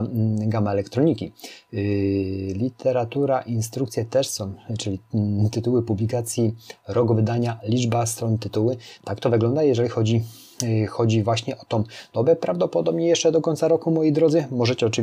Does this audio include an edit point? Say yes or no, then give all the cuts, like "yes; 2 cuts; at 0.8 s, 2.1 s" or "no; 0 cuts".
yes; 1 cut; at 9.0 s